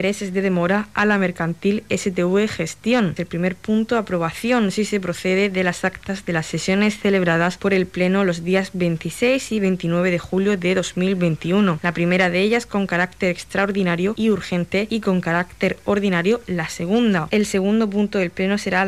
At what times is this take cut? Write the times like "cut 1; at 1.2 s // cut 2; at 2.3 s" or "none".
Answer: cut 1; at 3.2 s // cut 2; at 17.3 s